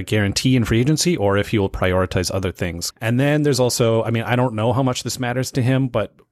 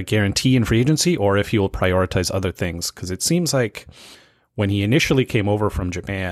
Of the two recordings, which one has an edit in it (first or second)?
first